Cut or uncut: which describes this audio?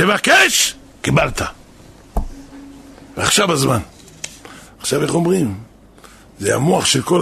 cut